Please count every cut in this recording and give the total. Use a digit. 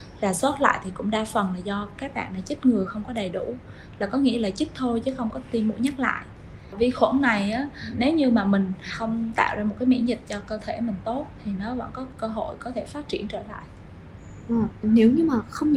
2